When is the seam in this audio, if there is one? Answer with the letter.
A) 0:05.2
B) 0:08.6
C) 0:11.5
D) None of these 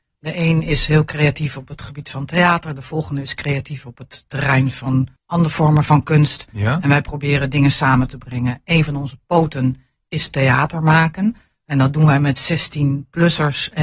A